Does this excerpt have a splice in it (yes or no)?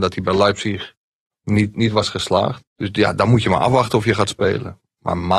yes